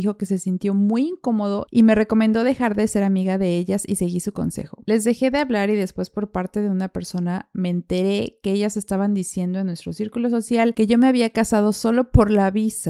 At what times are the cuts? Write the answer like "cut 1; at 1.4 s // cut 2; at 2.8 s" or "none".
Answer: none